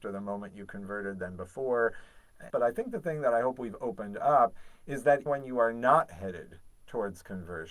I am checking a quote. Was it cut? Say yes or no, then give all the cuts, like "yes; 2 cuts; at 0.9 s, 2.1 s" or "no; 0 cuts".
yes; 2 cuts; at 2.5 s, 5.3 s